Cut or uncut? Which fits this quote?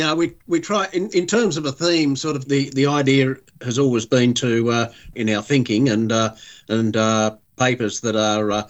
cut